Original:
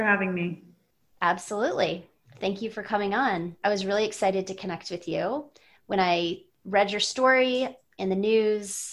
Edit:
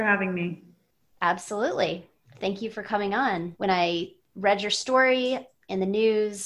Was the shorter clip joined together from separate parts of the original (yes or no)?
yes